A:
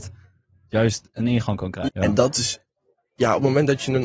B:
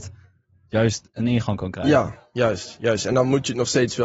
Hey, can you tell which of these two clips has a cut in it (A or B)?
A